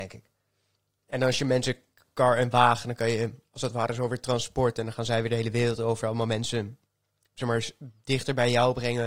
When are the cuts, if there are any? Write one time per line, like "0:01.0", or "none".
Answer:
none